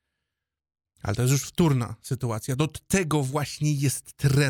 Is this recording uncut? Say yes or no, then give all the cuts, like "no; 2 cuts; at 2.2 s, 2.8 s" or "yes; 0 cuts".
yes; 0 cuts